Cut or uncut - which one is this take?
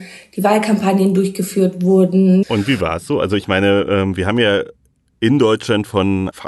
cut